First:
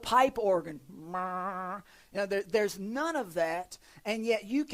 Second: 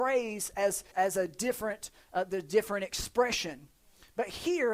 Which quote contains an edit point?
second; 1 cut; at 0.9 s

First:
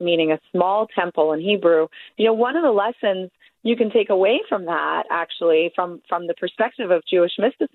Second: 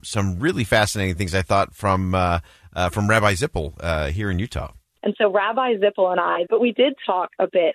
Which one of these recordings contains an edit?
second; 2 cuts; at 5.0 s, 6.5 s

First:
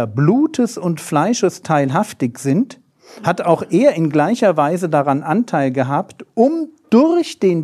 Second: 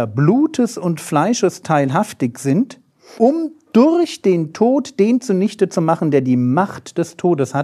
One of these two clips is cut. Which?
second; 1 cut; at 3.2 s

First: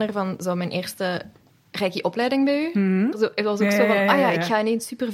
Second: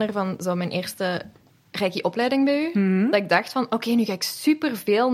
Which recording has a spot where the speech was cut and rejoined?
first; 1 cut; at 3.1 s

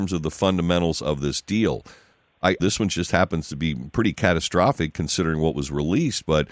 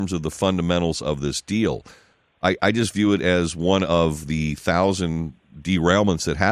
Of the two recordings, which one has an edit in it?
first; 1 cut; at 2.6 s

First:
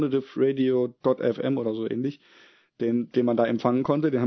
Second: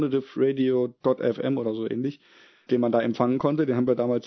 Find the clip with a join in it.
second; 1 cut; at 2.7 s

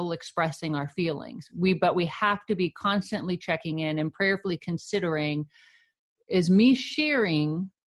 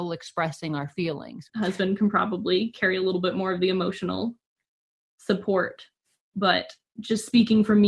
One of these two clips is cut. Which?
second; 1 cut; at 1.5 s

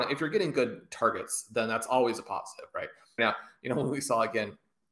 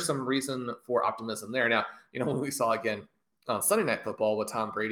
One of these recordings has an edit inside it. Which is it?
first; 1 cut; at 3.2 s

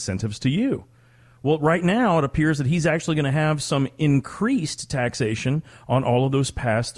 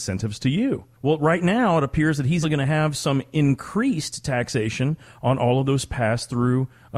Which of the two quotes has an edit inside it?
second; 2 cuts; at 0.9 s, 2.4 s

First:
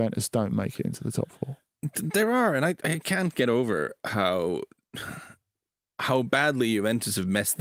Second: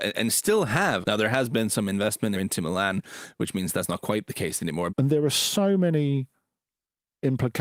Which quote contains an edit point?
second; 3 cuts; at 1.0 s, 2.3 s, 4.9 s

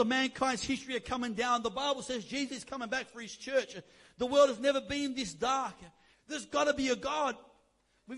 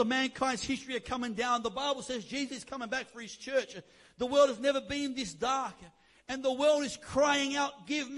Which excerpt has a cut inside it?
first; 1 cut; at 6.1 s

